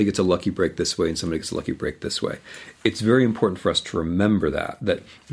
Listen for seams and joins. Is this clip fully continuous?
yes; 0 cuts

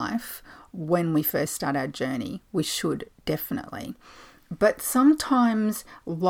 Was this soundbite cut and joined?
no; 0 cuts

